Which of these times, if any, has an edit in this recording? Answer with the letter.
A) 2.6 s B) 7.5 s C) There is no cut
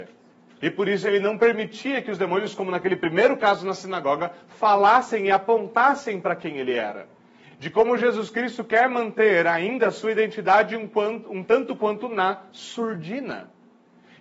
B